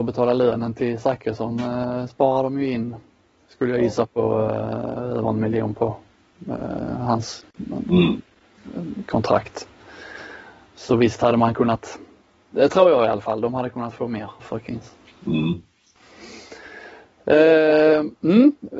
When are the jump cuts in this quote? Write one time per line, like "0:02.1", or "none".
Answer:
0:14.4